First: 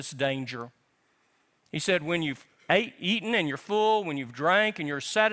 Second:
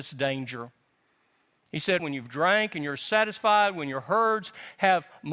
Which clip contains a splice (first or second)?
second